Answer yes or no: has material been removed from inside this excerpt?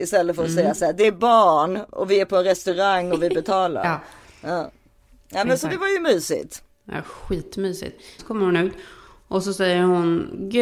yes